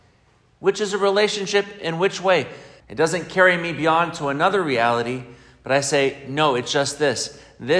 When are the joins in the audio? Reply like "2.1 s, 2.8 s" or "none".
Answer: 2.8 s